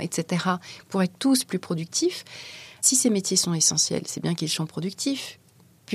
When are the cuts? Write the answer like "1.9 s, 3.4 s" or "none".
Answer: none